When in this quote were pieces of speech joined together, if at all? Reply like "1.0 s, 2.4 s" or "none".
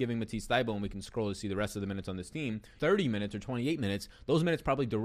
2.8 s

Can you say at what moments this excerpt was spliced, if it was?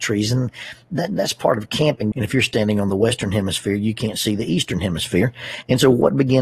2.1 s

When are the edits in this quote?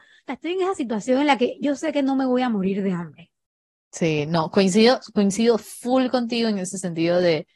none

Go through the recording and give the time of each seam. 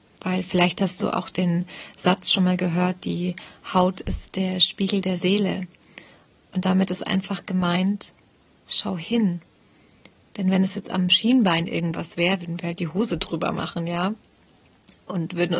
none

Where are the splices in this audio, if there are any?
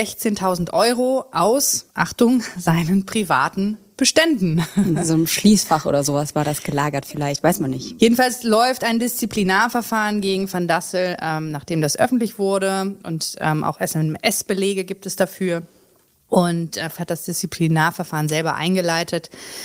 8.0 s, 17.0 s

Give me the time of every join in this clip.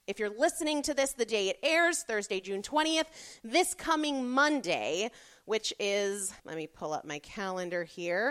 6.4 s

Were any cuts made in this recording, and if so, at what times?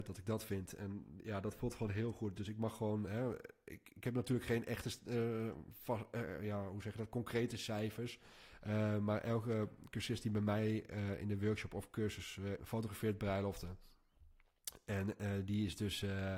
12.6 s

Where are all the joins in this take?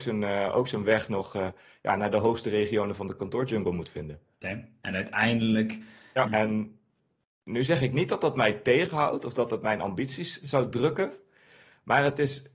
4.4 s, 6.3 s

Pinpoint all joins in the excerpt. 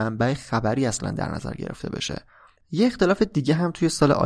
2.6 s

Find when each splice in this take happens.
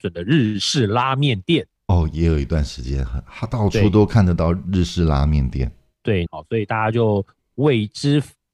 1.8 s, 6.3 s

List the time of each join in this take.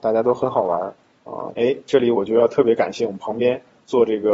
1.5 s

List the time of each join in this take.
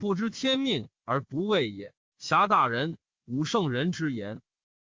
none

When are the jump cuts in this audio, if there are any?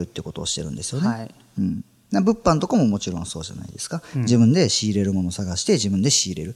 none

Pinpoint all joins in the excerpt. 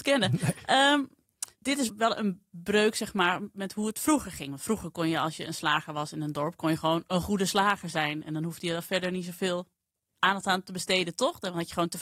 1.9 s

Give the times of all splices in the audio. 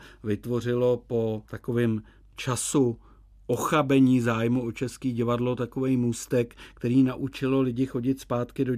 1.5 s

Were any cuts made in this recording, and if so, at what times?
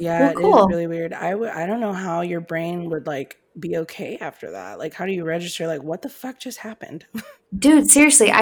none

